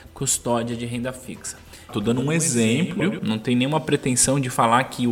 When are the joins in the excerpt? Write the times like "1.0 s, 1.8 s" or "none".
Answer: 1.9 s, 3.0 s